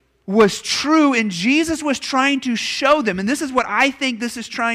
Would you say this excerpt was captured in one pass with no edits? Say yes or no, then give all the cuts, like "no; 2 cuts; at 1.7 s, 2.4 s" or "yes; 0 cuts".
yes; 0 cuts